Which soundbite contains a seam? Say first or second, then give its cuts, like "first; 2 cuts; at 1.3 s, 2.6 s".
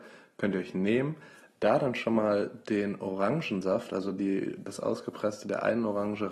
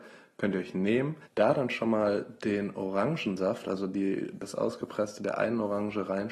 second; 1 cut; at 1.3 s